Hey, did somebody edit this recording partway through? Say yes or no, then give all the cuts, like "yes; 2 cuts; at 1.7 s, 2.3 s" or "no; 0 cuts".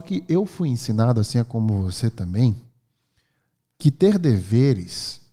no; 0 cuts